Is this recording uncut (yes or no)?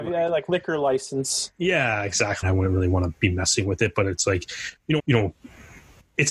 no